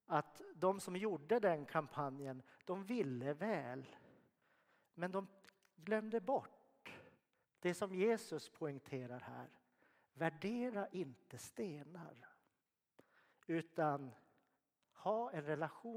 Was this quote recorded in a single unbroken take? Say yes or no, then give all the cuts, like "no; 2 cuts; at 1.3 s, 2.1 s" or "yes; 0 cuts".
yes; 0 cuts